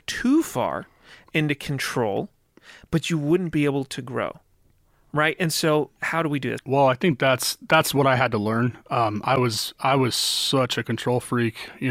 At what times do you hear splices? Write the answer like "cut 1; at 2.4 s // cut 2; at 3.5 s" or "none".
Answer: cut 1; at 6.6 s